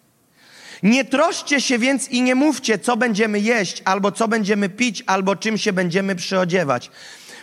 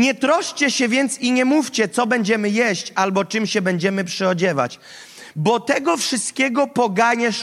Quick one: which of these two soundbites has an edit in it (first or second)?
second